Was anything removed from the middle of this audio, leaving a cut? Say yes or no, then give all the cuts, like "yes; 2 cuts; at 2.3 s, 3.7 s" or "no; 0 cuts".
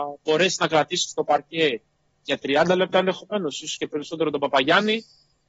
no; 0 cuts